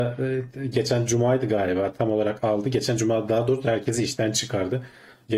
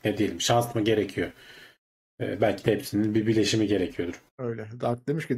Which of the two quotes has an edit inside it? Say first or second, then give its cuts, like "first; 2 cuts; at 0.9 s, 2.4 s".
second; 1 cut; at 4.3 s